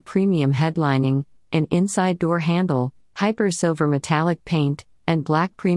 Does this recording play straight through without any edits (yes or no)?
yes